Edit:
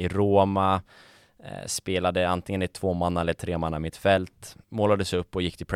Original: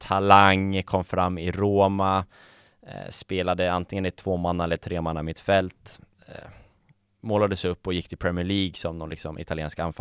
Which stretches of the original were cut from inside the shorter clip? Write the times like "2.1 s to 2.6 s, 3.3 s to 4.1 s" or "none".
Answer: 6.1 s to 7.2 s